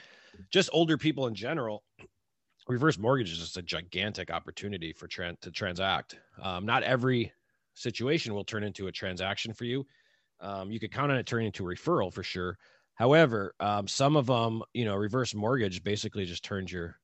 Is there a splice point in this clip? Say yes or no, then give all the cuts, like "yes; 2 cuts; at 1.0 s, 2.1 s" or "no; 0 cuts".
no; 0 cuts